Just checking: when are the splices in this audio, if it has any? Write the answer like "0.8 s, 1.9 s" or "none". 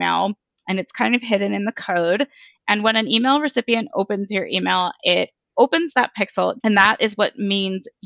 6.6 s